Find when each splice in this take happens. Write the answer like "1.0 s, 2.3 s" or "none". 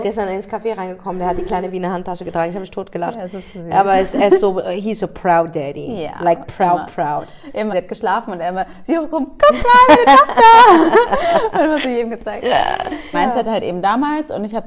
7.7 s, 13.1 s